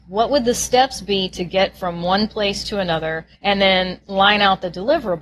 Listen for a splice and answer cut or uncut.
cut